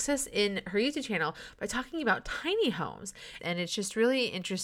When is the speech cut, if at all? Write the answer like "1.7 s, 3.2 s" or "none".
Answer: 3.4 s